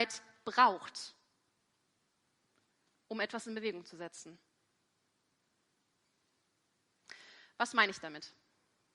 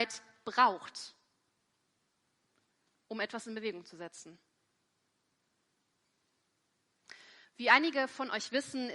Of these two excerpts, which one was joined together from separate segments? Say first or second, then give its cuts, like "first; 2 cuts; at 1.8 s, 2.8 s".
second; 1 cut; at 7.4 s